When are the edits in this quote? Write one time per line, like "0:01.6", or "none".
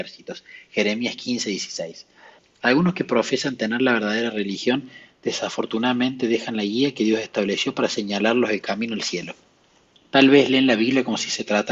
0:02.4